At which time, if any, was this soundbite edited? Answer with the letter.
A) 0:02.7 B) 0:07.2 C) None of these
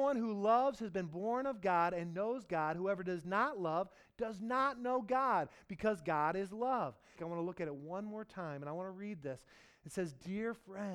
B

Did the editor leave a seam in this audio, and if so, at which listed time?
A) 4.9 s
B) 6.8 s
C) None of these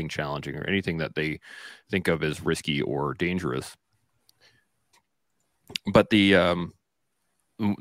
A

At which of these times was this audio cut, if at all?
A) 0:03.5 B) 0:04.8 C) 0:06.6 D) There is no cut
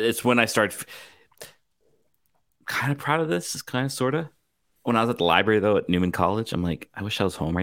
B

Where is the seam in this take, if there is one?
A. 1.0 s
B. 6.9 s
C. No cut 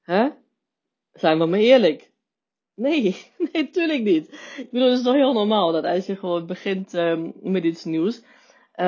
C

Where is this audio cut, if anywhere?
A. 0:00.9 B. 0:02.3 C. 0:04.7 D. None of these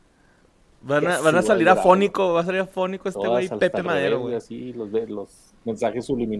D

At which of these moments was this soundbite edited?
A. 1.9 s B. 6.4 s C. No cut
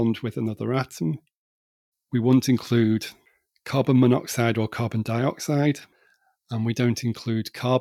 A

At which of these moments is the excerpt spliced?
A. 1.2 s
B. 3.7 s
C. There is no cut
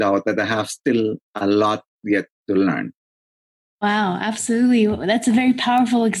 A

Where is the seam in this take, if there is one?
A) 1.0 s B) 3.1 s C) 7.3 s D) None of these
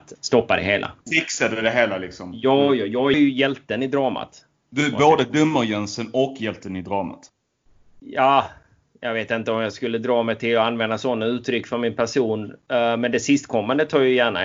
B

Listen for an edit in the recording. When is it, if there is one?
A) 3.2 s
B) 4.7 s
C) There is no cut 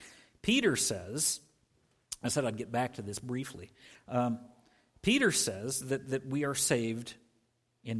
C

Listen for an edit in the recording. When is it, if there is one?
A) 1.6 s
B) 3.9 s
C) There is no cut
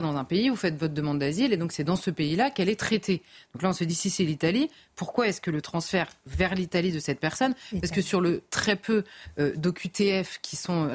C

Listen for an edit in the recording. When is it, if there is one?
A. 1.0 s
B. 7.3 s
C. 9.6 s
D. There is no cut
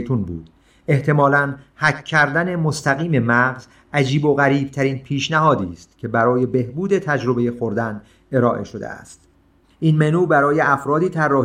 C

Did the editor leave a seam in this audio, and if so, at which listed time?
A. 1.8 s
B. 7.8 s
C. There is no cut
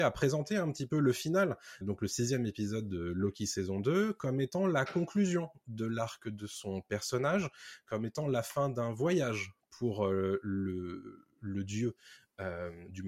A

